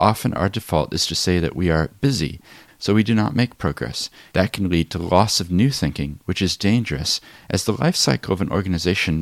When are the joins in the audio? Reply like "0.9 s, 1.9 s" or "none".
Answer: 2.7 s, 4.3 s